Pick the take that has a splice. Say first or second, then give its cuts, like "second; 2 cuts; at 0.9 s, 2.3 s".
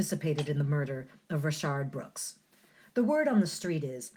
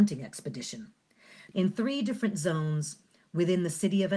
second; 1 cut; at 1.5 s